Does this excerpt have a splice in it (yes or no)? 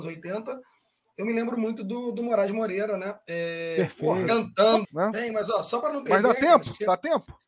yes